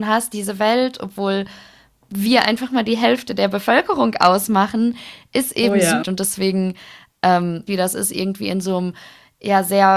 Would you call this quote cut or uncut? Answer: cut